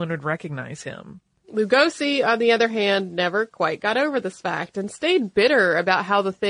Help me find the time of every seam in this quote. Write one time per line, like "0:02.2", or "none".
0:01.4